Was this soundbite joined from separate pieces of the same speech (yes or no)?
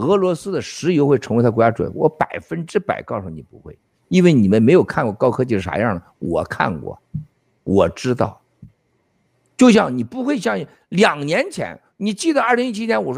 no